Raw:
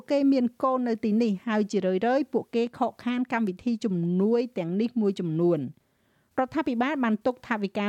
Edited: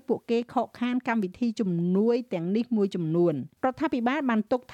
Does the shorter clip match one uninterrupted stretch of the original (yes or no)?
no